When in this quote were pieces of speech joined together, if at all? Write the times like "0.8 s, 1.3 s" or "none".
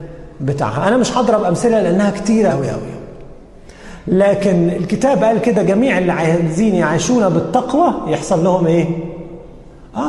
2.5 s